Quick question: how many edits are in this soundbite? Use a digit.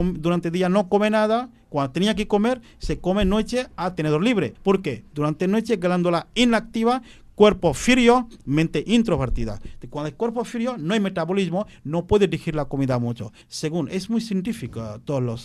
2